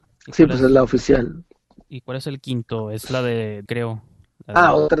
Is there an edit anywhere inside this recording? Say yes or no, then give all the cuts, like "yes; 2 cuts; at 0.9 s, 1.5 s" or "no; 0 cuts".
yes; 1 cut; at 3.7 s